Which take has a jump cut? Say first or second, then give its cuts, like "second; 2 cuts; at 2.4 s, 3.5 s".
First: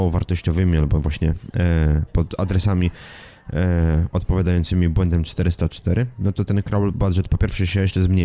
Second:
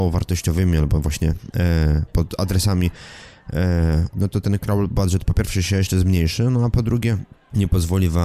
second; 1 cut; at 4.1 s